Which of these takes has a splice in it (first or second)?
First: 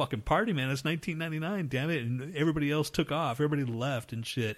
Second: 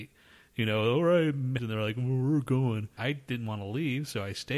second